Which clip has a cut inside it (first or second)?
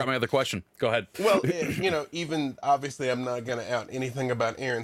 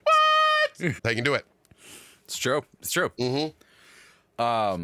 second